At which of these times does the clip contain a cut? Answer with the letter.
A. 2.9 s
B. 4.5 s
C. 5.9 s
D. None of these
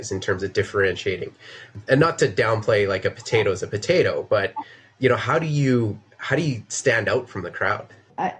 D